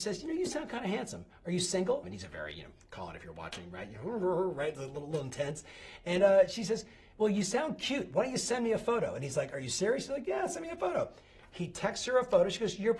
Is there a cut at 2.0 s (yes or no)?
yes